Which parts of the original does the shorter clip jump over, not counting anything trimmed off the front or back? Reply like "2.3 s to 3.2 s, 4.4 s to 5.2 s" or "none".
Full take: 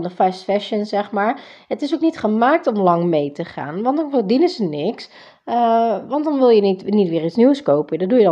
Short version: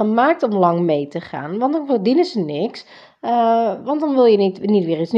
none